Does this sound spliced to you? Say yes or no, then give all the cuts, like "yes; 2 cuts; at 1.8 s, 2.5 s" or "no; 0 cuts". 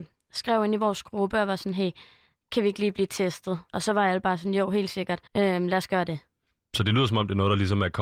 yes; 2 cuts; at 3.7 s, 5.3 s